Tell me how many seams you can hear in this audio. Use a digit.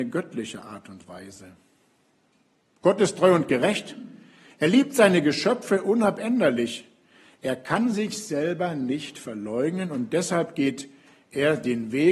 0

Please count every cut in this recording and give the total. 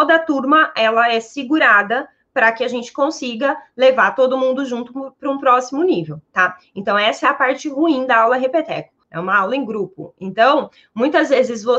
1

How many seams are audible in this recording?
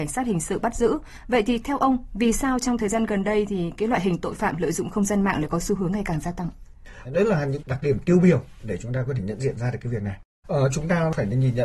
2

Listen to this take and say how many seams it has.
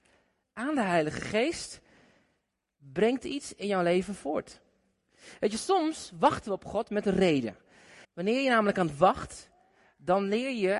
1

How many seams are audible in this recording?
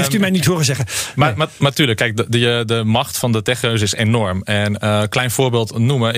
0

